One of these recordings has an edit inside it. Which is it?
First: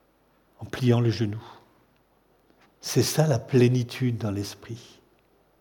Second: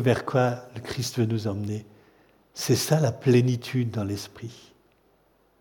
first; 1 cut; at 2.6 s

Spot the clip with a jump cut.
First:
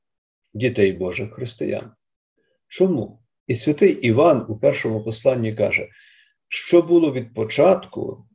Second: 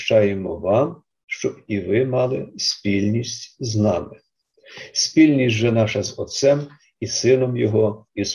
first; 1 cut; at 3.4 s

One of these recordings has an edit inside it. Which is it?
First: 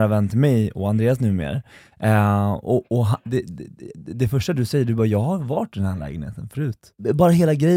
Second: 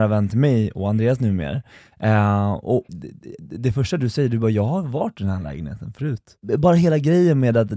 second; 1 cut; at 2.9 s

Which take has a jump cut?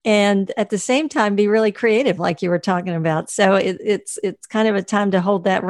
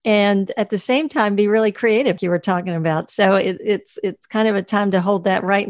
second; 1 cut; at 2.2 s

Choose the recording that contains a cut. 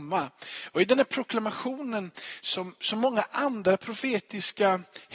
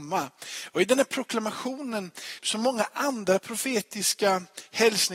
second; 1 cut; at 2.4 s

